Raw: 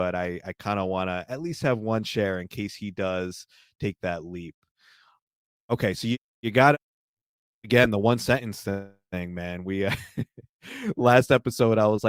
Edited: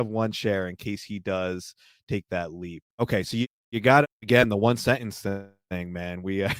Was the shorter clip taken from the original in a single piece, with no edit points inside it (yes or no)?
no